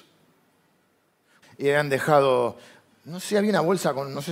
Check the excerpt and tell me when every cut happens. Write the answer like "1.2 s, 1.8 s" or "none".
1.4 s